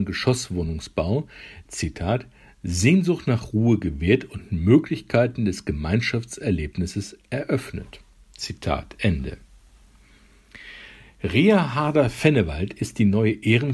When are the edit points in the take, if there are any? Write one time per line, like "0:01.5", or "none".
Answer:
0:01.7